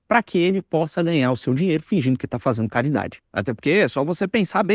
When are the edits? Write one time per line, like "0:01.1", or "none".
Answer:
0:03.3